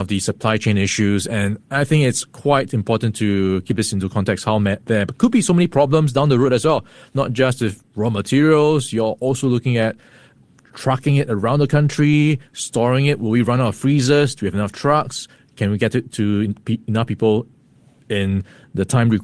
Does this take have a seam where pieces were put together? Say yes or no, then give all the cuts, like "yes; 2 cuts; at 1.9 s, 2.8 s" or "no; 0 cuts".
no; 0 cuts